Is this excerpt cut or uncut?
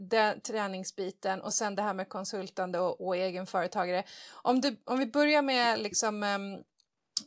uncut